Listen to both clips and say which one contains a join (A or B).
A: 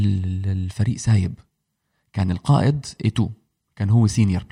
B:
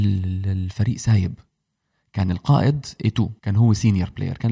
B